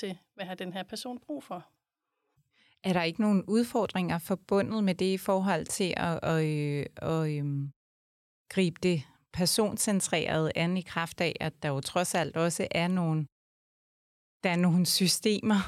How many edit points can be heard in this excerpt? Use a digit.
0